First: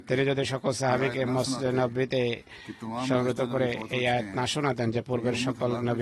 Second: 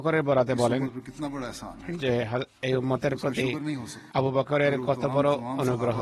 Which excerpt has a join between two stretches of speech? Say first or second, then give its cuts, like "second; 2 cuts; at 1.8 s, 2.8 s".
second; 1 cut; at 4.1 s